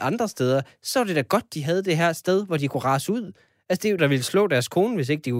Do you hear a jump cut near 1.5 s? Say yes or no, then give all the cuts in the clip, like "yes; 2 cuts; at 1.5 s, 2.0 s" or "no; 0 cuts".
no; 1 cut; at 4.0 s